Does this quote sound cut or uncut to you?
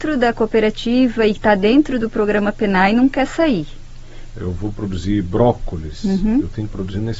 cut